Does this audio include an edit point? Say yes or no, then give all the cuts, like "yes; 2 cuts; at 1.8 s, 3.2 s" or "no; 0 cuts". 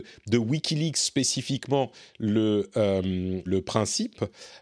yes; 1 cut; at 3.5 s